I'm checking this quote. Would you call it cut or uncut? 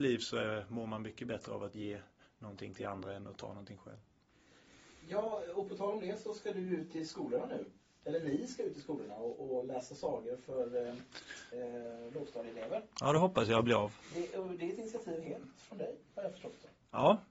uncut